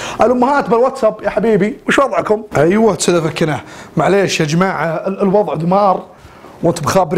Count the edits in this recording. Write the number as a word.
one